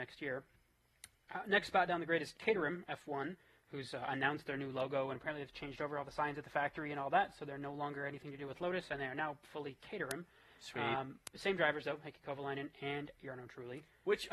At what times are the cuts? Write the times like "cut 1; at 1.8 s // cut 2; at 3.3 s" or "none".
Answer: none